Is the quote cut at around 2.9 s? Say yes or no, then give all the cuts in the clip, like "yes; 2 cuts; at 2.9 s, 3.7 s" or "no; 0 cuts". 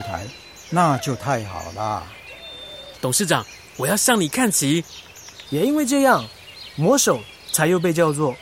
yes; 2 cuts; at 2.9 s, 5.5 s